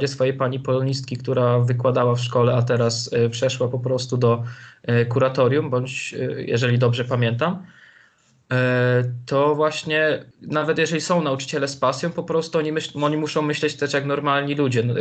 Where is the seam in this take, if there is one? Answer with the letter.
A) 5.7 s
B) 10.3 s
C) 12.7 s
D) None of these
B